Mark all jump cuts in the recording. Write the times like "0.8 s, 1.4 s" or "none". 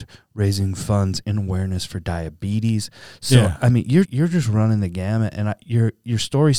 4.1 s